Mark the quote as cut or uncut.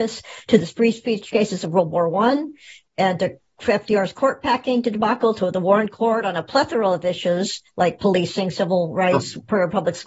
uncut